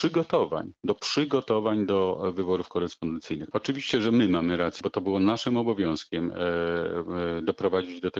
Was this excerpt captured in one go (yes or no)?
no